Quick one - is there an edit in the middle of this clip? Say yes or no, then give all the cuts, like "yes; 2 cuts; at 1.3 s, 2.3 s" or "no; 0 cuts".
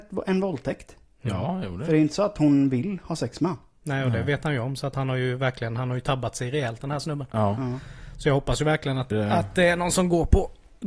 yes; 1 cut; at 9.1 s